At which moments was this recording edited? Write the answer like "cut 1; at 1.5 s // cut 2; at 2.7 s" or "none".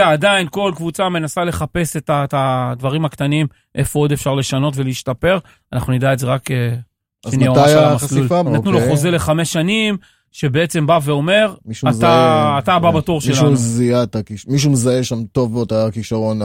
cut 1; at 8.5 s